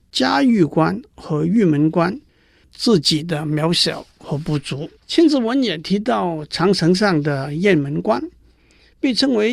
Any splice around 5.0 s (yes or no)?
yes